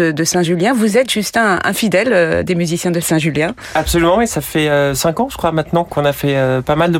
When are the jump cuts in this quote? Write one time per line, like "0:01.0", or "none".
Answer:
none